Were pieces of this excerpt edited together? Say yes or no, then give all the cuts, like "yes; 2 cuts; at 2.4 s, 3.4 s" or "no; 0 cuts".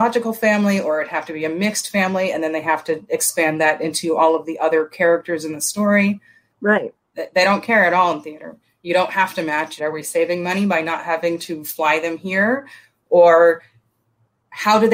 yes; 2 cuts; at 6.5 s, 9.8 s